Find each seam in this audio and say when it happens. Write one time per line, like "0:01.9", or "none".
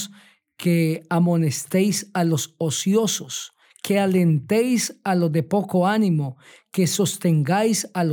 none